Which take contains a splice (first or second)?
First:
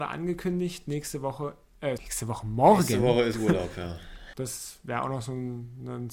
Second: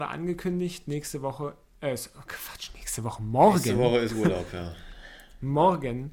first